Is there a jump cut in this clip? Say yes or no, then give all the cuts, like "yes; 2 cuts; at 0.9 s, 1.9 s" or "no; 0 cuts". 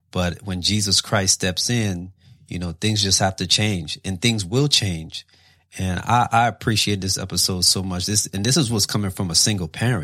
no; 0 cuts